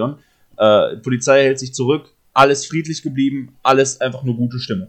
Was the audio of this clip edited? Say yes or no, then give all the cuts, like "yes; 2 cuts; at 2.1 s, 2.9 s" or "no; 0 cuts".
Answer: no; 0 cuts